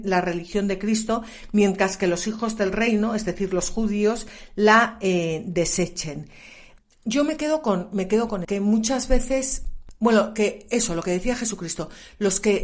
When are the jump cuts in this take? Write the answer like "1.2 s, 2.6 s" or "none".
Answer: 8.4 s